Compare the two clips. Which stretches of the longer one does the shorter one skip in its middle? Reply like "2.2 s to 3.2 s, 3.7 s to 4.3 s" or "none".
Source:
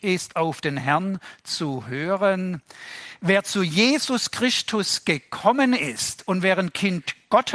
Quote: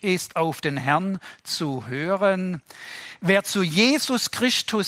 none